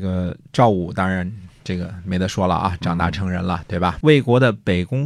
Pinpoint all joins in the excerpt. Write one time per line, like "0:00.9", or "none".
0:04.0